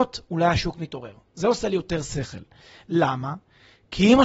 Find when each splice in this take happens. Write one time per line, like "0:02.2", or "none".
none